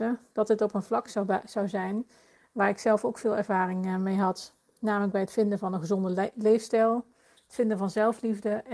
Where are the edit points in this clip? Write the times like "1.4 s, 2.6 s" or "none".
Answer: none